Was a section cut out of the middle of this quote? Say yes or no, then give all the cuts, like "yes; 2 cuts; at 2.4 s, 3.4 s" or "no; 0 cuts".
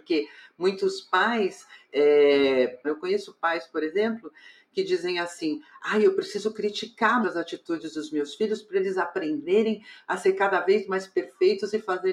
yes; 2 cuts; at 2.8 s, 7.2 s